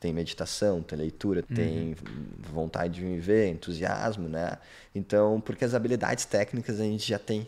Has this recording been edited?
yes; 1 cut; at 1.4 s

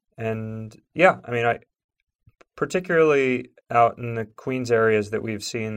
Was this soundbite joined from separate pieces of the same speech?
yes; 1 cut; at 3.6 s

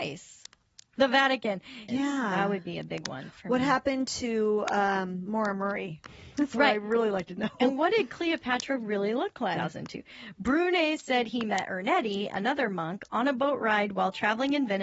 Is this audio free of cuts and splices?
no; 2 cuts; at 1.9 s, 9.6 s

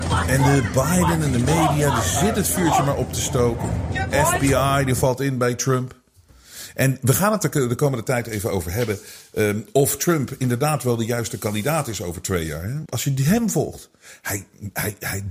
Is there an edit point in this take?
yes; 1 cut; at 12.9 s

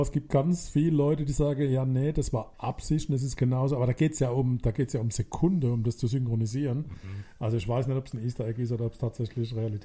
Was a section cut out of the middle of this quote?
no; 0 cuts

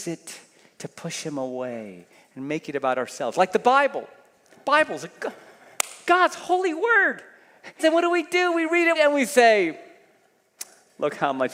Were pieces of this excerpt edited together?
yes; 2 cuts; at 7.8 s, 9.0 s

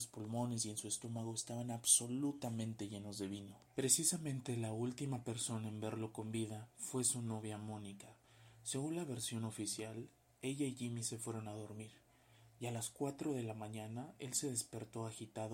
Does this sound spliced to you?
no; 0 cuts

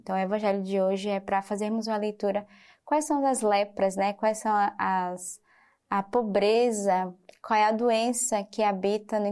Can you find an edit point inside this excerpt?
no; 0 cuts

